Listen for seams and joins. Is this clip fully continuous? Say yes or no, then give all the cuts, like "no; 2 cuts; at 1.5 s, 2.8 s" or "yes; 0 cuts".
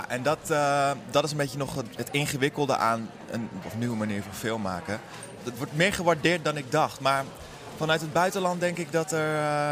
no; 3 cuts; at 2.0 s, 3.6 s, 5.4 s